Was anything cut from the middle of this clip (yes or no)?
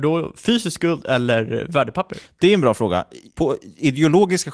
no